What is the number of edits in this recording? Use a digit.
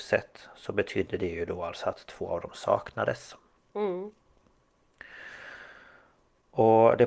0